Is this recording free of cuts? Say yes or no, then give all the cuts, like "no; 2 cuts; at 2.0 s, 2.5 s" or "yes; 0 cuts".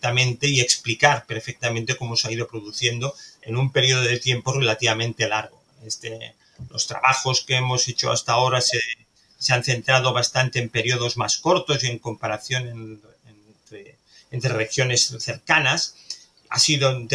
yes; 0 cuts